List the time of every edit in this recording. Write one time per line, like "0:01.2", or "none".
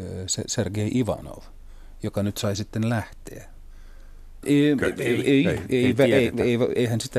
0:04.4